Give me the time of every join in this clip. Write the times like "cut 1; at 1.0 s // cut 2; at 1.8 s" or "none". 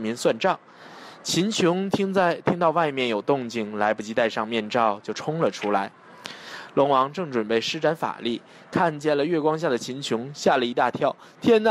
none